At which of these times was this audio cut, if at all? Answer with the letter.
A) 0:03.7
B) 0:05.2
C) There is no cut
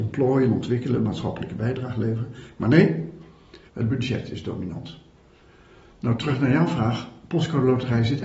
A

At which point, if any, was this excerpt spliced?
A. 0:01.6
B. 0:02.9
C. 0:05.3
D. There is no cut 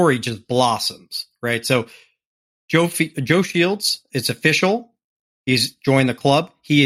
D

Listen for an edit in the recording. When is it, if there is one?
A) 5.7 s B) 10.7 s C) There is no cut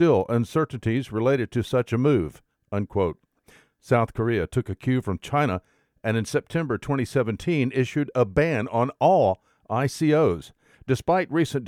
B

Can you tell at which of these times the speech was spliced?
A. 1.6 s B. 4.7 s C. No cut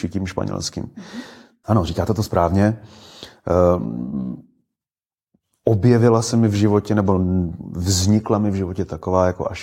A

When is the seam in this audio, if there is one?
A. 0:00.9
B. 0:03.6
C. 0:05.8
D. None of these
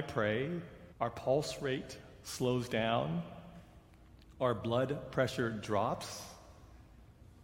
A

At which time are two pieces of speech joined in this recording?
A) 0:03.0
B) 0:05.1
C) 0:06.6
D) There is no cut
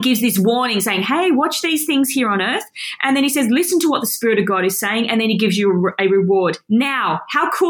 D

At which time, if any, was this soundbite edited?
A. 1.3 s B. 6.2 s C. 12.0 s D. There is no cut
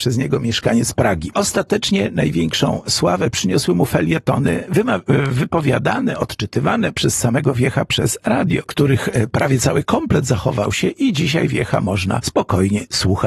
A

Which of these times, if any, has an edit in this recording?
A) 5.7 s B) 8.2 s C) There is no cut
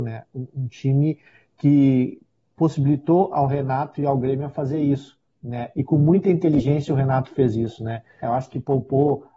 B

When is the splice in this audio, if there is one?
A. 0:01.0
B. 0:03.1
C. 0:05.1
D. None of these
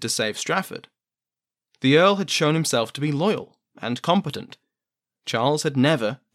D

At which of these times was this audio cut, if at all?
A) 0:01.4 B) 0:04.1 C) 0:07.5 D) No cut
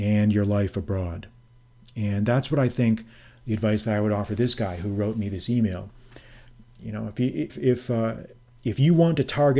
C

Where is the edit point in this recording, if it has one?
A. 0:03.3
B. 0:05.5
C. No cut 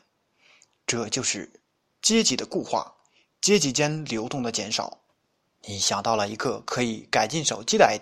B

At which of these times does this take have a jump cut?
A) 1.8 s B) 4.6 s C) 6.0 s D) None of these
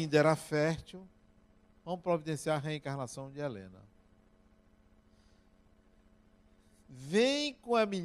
A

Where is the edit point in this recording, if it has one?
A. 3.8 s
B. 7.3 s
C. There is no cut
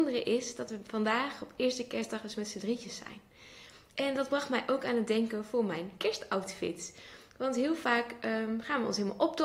C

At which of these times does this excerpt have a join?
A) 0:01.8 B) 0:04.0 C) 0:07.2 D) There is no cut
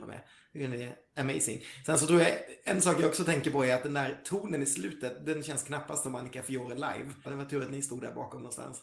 C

